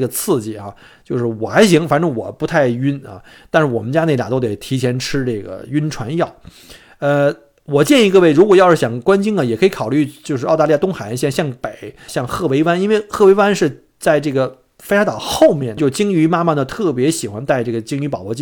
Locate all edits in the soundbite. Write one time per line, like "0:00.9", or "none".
0:12.1
0:15.8